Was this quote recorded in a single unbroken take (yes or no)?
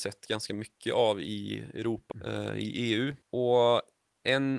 no